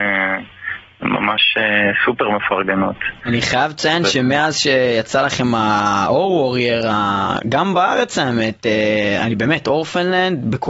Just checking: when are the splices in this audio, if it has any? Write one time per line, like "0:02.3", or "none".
0:09.2